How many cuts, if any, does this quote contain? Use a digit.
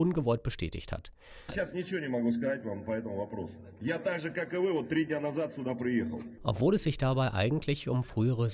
2